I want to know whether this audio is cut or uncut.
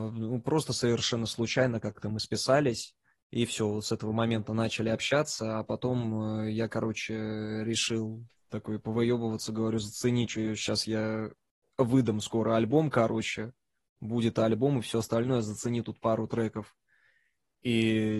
uncut